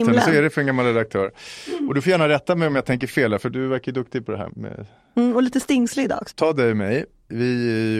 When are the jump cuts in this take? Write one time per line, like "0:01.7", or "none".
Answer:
0:04.5
0:06.3